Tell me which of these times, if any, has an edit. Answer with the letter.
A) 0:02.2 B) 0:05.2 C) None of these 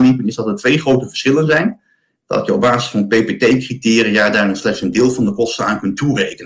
A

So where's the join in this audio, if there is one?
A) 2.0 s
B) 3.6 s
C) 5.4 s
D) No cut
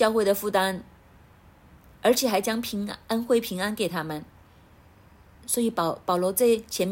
C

